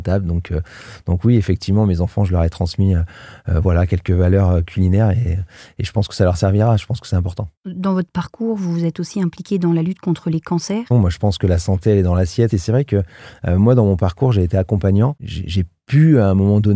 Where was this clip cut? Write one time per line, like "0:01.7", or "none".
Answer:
0:10.9
0:12.5